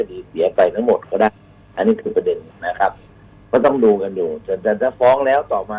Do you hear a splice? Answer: no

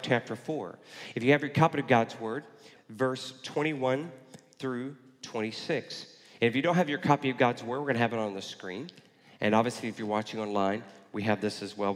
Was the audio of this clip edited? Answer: yes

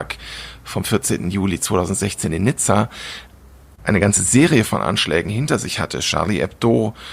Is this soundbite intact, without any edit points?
yes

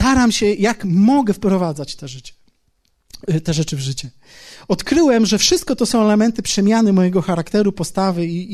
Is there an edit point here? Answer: no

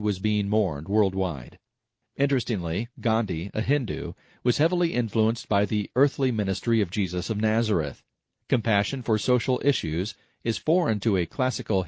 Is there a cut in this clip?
no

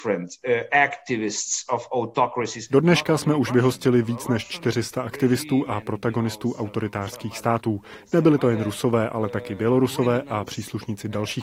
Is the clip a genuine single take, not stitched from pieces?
yes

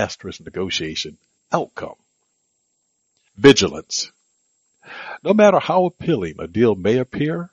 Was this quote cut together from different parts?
no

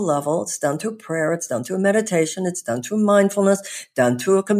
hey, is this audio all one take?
yes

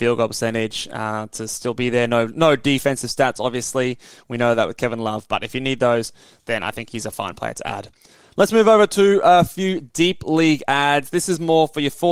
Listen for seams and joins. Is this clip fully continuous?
yes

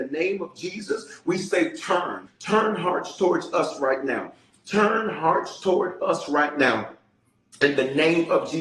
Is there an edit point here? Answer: yes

